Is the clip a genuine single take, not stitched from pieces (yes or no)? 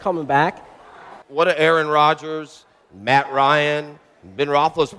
no